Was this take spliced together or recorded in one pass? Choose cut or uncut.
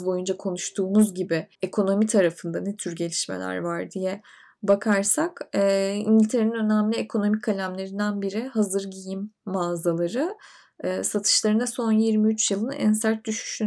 cut